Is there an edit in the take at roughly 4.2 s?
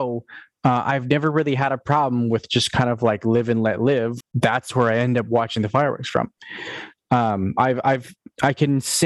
yes; 1 cut; at 4.2 s

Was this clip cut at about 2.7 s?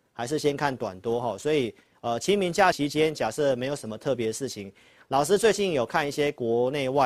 yes; 1 cut; at 2.7 s

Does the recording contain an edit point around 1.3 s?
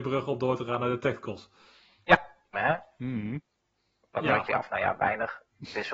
no; 2 cuts; at 2.5 s, 4.5 s

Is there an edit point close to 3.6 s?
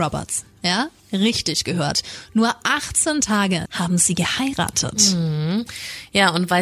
yes; 1 cut; at 3.6 s

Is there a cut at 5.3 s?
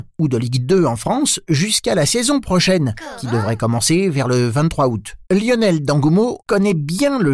yes; 2 cuts; at 5.3 s, 6.4 s

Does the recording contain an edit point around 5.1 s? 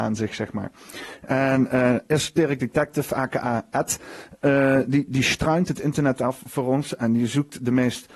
yes; 1 cut; at 5.1 s

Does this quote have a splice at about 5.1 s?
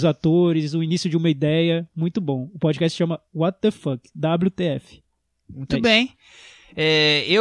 no; 0 cuts

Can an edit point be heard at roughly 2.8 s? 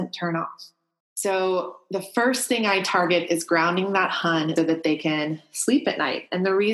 no; 2 cuts; at 1.0 s, 4.6 s

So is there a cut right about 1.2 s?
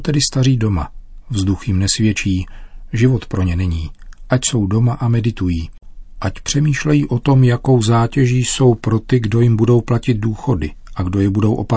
no; 0 cuts

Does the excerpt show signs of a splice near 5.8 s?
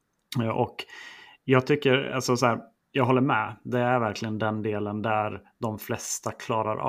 no; 1 cut; at 2.8 s

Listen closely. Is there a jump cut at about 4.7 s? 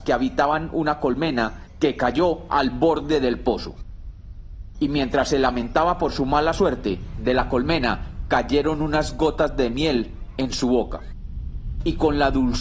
yes; 1 cut; at 4.7 s

